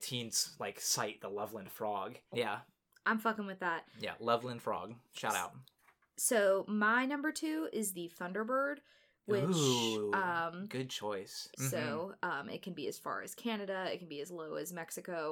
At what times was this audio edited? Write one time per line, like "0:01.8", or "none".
0:02.3
0:11.5